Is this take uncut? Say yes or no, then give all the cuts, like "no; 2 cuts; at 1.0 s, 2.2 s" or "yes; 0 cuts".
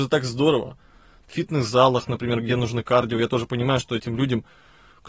no; 1 cut; at 1.2 s